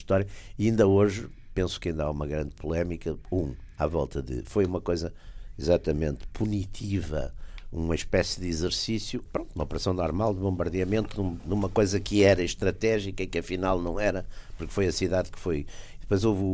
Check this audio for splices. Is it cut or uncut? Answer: cut